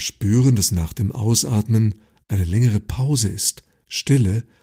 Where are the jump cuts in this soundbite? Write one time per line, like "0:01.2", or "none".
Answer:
none